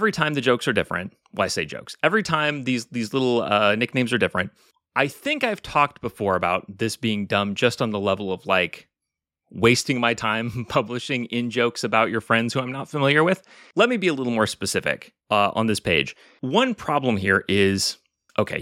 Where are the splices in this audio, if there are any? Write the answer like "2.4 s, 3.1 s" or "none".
none